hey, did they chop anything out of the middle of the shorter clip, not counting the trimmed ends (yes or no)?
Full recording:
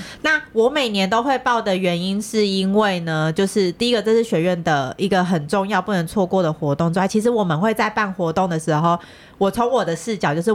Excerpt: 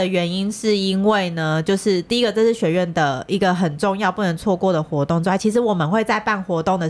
no